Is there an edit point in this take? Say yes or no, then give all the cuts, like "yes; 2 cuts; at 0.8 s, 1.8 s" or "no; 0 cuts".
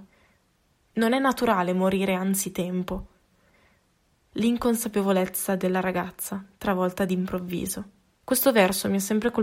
yes; 1 cut; at 8.2 s